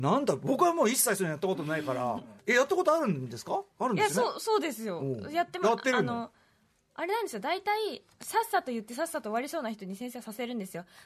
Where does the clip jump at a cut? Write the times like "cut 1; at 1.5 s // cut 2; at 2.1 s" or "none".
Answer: cut 1; at 8.2 s